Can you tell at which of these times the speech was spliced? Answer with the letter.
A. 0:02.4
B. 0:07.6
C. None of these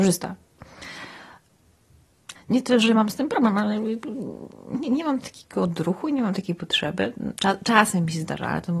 A